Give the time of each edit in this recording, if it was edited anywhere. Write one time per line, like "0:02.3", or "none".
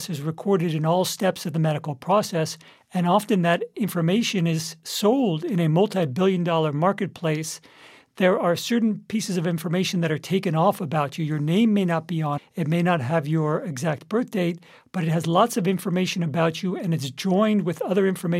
0:12.4